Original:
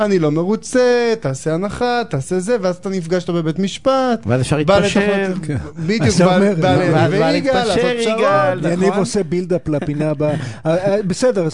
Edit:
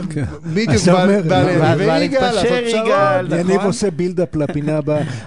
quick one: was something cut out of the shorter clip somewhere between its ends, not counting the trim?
no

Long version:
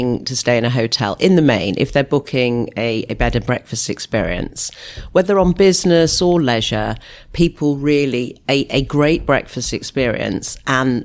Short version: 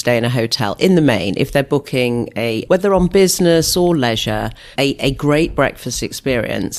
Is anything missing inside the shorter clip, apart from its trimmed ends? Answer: yes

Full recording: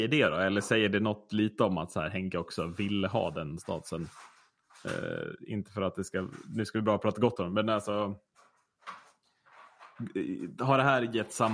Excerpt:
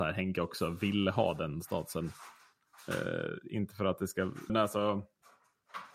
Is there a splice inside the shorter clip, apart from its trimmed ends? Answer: yes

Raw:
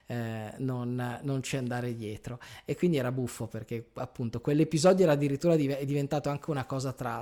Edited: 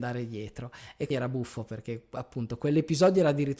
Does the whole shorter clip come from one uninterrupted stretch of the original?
no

